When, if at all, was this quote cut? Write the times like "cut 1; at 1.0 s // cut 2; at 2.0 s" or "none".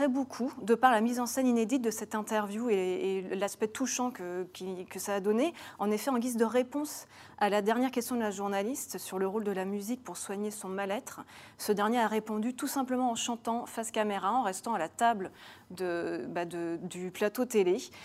none